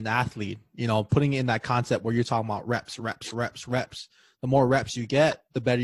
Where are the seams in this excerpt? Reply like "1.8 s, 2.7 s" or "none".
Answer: none